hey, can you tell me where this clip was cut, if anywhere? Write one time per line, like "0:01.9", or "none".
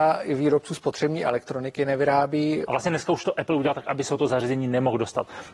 0:02.7